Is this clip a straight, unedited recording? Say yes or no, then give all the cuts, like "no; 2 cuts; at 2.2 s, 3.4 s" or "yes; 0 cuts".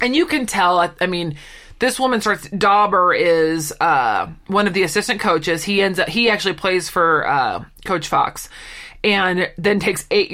yes; 0 cuts